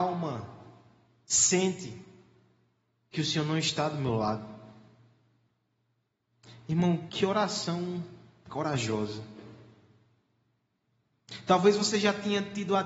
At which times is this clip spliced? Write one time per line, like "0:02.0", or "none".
0:07.1